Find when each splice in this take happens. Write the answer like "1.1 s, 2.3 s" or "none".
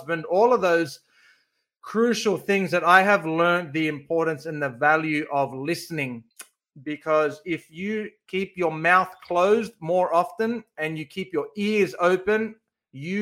none